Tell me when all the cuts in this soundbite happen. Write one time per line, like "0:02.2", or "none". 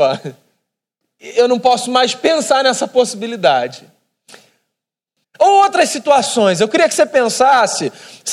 0:05.2